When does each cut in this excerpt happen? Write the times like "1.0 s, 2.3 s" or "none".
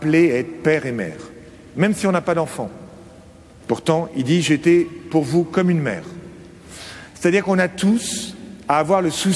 3.6 s